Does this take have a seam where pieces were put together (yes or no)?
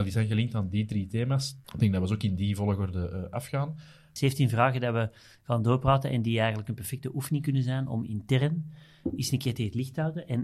yes